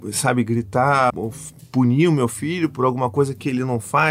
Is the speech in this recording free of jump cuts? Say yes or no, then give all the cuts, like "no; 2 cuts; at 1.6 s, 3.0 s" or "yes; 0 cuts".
no; 1 cut; at 1.1 s